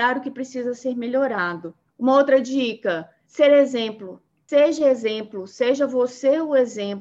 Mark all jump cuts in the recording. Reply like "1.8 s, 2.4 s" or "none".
none